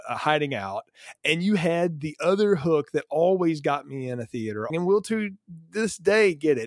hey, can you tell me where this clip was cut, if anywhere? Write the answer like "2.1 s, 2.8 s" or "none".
4.7 s